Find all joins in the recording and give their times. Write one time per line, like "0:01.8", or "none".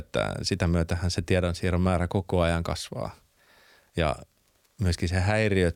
none